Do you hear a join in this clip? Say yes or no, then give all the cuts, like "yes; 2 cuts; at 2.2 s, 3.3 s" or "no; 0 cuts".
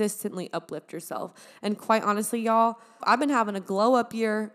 yes; 1 cut; at 3.0 s